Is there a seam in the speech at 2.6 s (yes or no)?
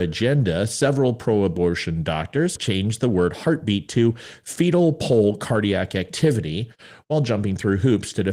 yes